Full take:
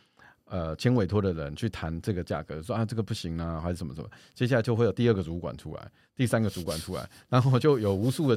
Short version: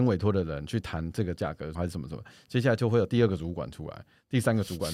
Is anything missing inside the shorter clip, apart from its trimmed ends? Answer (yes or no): yes